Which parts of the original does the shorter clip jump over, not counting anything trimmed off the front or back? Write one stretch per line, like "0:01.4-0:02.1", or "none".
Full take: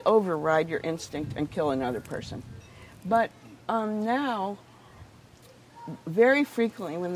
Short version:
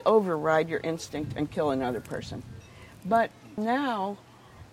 0:03.6-0:04.0